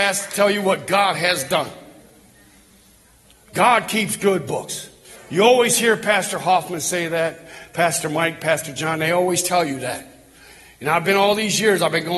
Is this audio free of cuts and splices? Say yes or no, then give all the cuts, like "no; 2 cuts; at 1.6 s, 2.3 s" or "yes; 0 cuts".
yes; 0 cuts